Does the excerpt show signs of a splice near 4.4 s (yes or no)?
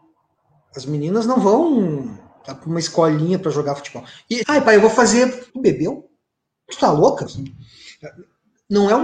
yes